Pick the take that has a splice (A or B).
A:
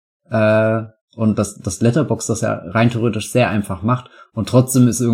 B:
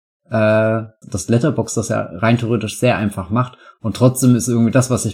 B